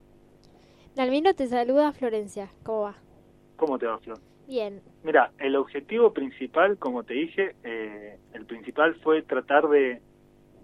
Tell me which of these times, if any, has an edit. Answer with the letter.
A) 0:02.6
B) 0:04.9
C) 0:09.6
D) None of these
B